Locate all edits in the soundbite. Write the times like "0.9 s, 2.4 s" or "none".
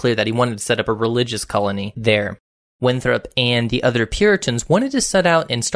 none